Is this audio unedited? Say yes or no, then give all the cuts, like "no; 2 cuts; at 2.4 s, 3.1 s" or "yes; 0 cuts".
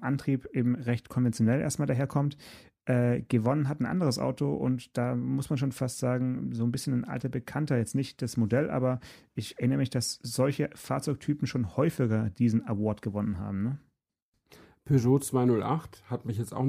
yes; 0 cuts